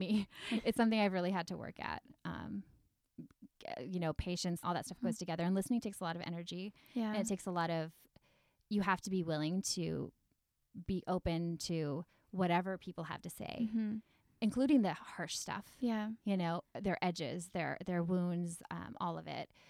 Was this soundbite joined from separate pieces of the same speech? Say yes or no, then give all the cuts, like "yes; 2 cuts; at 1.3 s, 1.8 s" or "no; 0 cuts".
yes; 1 cut; at 4.6 s